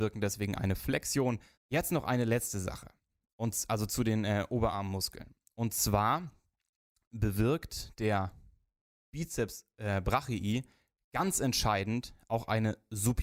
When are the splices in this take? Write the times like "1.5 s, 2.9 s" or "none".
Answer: 1.6 s